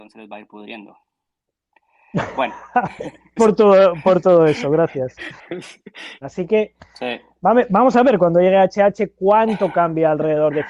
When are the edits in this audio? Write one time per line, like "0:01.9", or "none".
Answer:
0:03.4
0:06.2